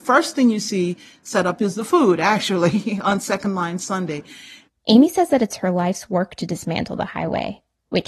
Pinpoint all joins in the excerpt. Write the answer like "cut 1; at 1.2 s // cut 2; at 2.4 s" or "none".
cut 1; at 4.7 s